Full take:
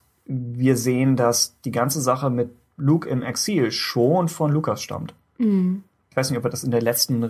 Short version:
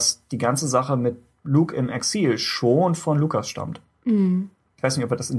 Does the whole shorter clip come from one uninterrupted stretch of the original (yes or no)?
yes